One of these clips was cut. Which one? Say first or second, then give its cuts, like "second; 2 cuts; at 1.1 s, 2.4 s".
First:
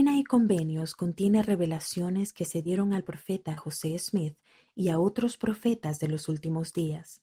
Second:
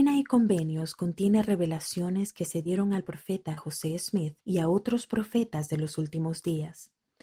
second; 1 cut; at 4.4 s